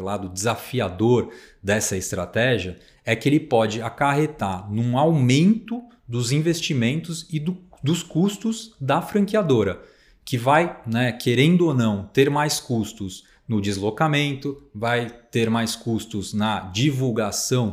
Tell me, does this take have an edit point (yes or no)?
no